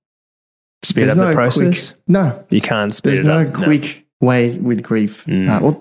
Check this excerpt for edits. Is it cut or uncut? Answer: cut